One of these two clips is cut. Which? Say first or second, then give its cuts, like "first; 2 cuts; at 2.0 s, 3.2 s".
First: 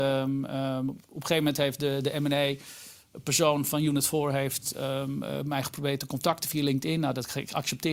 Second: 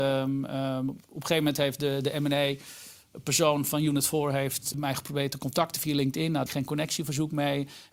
second; 2 cuts; at 4.7 s, 6.5 s